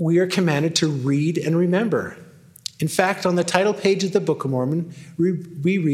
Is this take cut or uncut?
uncut